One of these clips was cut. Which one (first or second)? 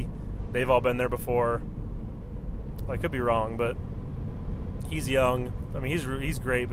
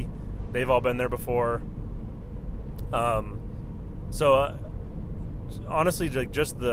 first